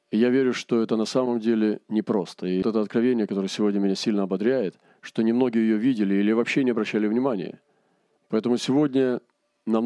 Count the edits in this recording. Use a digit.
2